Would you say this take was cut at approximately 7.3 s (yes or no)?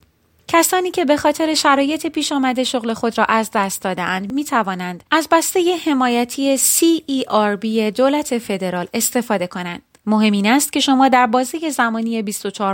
no